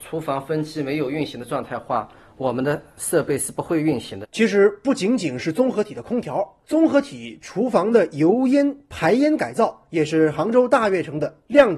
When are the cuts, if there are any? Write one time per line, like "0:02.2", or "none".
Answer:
0:04.2
0:06.6